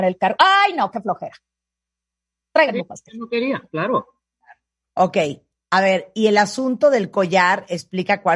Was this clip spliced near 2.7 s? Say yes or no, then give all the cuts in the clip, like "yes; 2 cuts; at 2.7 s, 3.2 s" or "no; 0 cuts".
no; 0 cuts